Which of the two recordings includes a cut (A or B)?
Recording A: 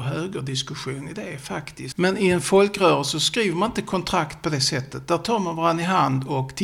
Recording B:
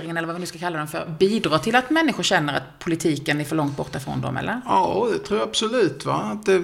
A